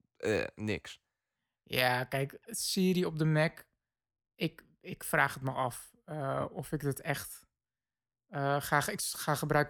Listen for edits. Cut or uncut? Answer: uncut